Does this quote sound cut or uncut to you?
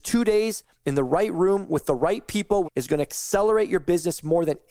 cut